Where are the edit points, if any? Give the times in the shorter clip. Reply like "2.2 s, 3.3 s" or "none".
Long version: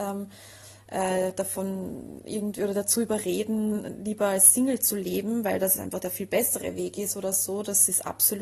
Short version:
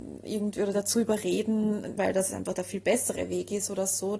2.0 s